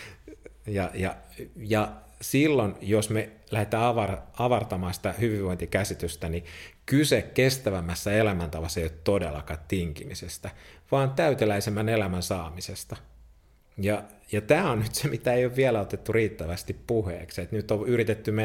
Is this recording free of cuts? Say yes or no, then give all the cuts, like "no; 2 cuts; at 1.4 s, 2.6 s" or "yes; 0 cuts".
yes; 0 cuts